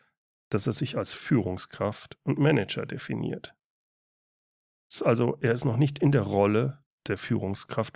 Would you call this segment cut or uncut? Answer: uncut